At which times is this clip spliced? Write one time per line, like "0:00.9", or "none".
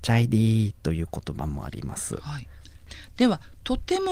0:02.6